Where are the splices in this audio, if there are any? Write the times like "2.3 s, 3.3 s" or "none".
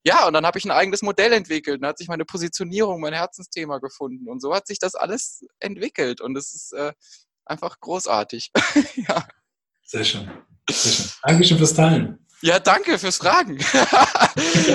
none